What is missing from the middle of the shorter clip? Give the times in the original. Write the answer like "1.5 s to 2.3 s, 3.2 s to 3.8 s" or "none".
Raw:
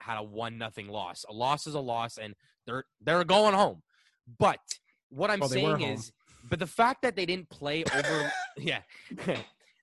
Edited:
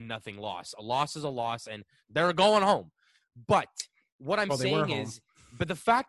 2.5 s to 2.9 s